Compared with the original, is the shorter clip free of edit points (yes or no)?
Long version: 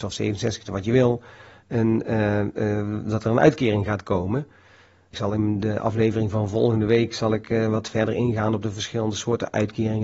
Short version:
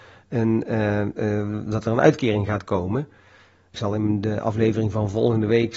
yes